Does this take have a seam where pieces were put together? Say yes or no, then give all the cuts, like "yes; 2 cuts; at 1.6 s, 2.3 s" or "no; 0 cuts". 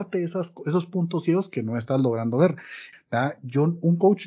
yes; 1 cut; at 2.9 s